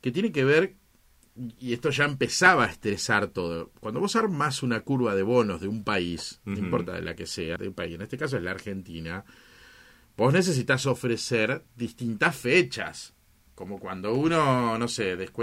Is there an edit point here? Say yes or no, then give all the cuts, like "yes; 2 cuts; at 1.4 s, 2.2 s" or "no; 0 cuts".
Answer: yes; 2 cuts; at 7.6 s, 13.5 s